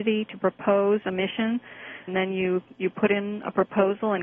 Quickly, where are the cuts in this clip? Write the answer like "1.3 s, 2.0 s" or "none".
2.1 s